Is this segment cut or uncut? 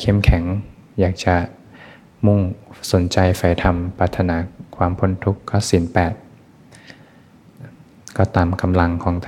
uncut